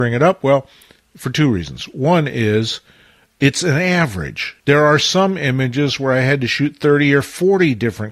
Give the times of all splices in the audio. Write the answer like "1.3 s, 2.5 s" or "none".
4.6 s